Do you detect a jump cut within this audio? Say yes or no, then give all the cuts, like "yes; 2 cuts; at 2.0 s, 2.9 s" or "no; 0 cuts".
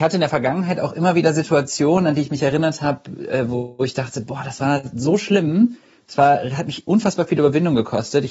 no; 0 cuts